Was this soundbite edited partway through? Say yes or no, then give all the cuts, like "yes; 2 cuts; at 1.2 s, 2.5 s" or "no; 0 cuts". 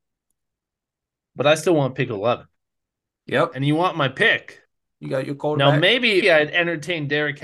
yes; 3 cuts; at 3.2 s, 4.9 s, 6.2 s